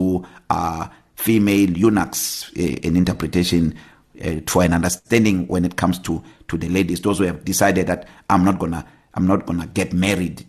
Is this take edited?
yes; 1 cut; at 2.8 s

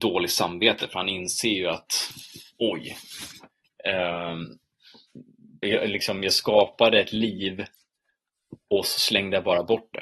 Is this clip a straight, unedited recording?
no; 1 cut; at 5.6 s

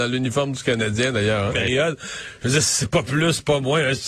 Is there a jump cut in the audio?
yes; 1 cut; at 1.5 s

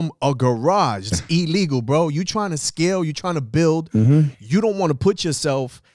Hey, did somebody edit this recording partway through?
yes; 1 cut; at 1.1 s

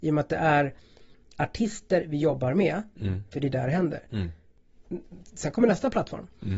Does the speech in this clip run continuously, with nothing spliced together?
no; 1 cut; at 3.3 s

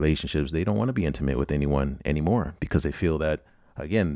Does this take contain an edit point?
no; 0 cuts

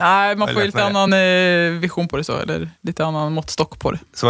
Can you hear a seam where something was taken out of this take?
no; 0 cuts

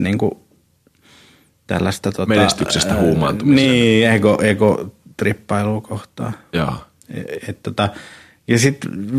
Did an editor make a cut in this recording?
no; 0 cuts

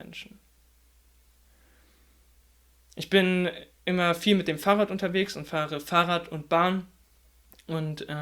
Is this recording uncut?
yes; 0 cuts

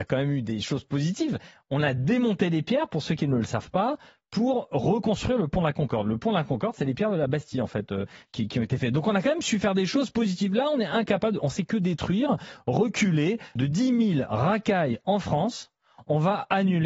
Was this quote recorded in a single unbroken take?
no; 1 cut; at 13.6 s

